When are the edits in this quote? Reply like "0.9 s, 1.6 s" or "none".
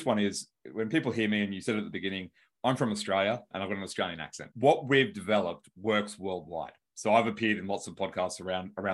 none